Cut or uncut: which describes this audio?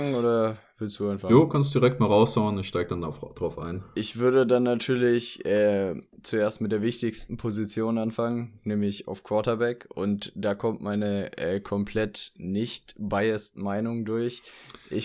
uncut